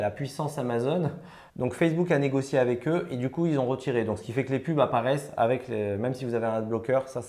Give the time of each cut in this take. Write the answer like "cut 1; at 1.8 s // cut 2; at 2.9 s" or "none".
cut 1; at 1.5 s